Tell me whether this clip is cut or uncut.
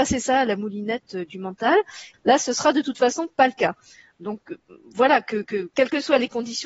cut